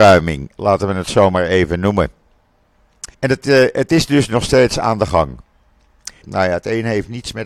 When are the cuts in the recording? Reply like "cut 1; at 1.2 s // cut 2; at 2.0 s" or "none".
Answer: cut 1; at 3.1 s // cut 2; at 6.2 s